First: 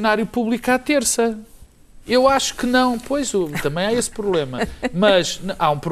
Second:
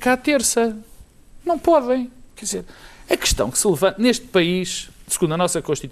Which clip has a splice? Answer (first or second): first